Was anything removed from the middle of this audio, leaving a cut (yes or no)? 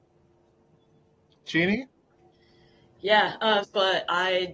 yes